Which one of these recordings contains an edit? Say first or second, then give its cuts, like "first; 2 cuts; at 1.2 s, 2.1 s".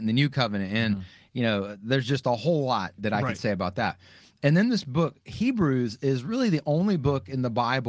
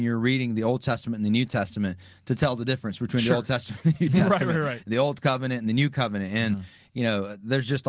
first; 1 cut; at 3.0 s